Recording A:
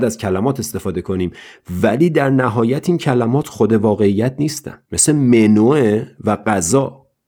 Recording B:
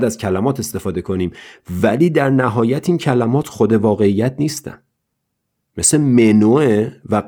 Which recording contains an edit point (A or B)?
A